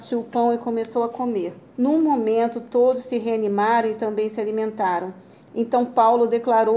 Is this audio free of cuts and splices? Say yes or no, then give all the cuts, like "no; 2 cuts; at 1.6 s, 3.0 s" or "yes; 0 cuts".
no; 2 cuts; at 1.7 s, 5.4 s